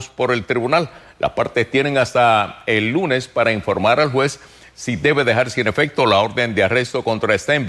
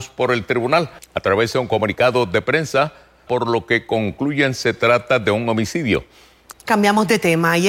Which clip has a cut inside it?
second; 3 cuts; at 1.0 s, 3.3 s, 6.5 s

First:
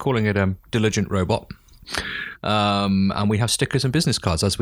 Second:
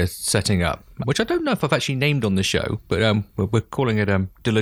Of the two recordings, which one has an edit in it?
second; 1 cut; at 1.0 s

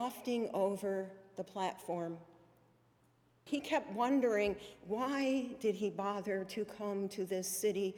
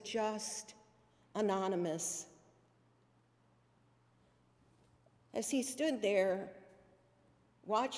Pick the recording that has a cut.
first; 1 cut; at 3.5 s

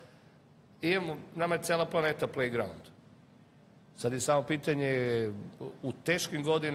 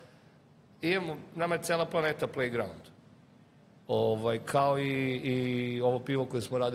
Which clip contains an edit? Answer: second; 1 cut; at 3.9 s

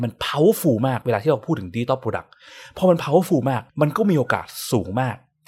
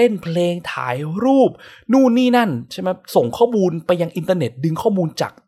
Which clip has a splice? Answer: first; 1 cut; at 3.7 s

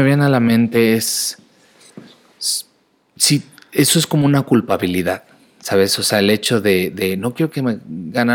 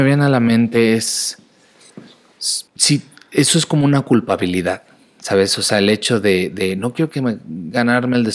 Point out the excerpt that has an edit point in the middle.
second; 1 cut; at 2.7 s

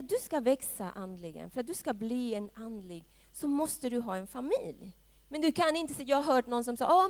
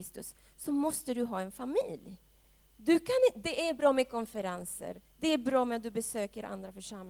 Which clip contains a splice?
first; 2 cuts; at 3.2 s, 5.1 s

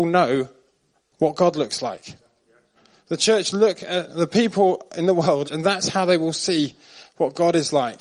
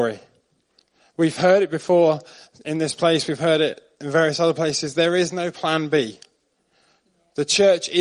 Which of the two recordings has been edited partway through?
first; 1 cut; at 5.4 s

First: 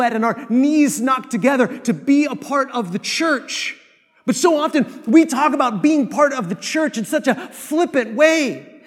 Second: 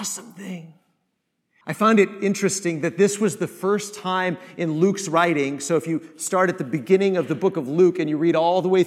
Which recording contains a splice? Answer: second; 1 cut; at 1.6 s

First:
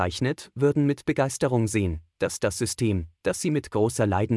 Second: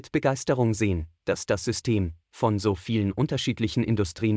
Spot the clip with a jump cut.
second; 1 cut; at 2.2 s

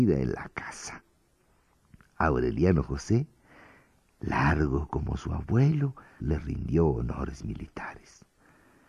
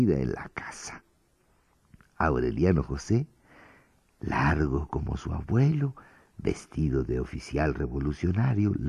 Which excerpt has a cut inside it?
first; 1 cut; at 6.2 s

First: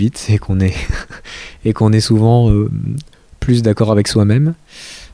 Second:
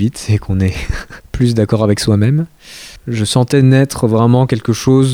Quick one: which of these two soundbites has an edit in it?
second; 2 cuts; at 1.2 s, 3.0 s

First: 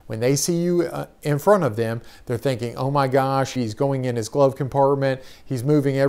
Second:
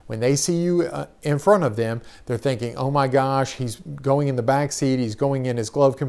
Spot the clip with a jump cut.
first; 1 cut; at 3.6 s

